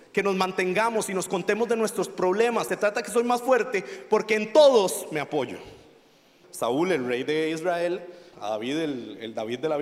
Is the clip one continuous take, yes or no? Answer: no